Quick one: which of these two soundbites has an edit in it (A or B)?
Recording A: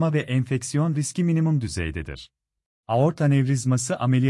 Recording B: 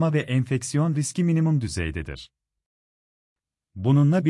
A